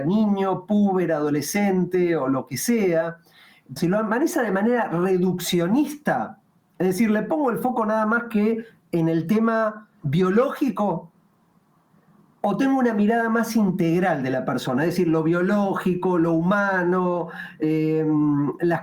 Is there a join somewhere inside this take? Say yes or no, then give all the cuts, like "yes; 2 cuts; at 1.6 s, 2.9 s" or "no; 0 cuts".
yes; 2 cuts; at 3.8 s, 10.0 s